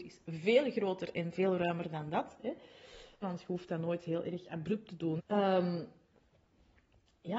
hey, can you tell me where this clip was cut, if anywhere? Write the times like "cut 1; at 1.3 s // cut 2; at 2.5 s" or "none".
cut 1; at 3.2 s // cut 2; at 5.2 s